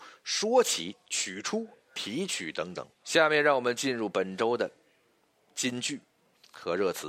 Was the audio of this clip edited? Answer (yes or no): yes